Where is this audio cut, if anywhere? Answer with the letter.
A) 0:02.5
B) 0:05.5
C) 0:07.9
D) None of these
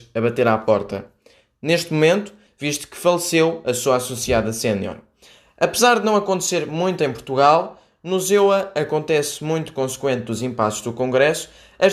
A